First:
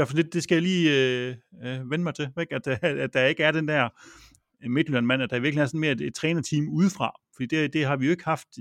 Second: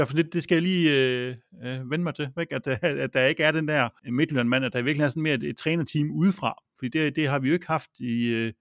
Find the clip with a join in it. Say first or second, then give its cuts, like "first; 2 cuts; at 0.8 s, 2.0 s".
second; 1 cut; at 4.0 s